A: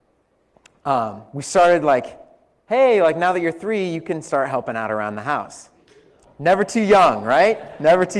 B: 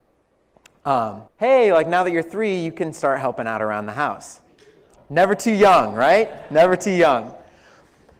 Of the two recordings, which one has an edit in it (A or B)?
B